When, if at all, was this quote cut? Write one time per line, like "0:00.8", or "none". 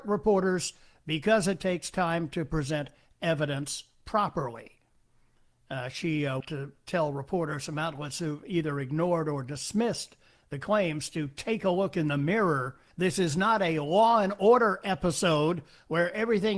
0:06.4
0:12.9